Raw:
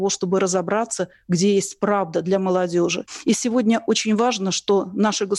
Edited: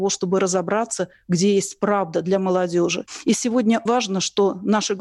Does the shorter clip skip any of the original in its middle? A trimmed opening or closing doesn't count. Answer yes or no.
yes